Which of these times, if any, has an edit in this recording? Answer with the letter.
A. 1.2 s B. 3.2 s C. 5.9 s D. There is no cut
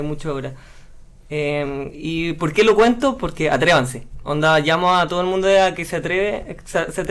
D